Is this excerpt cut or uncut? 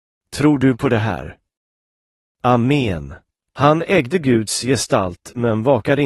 cut